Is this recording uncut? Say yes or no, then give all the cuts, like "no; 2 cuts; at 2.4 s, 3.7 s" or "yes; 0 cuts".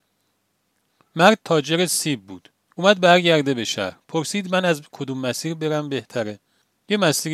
no; 1 cut; at 2.7 s